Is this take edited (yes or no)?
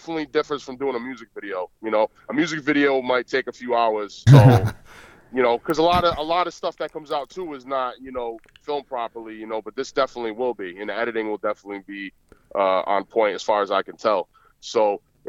yes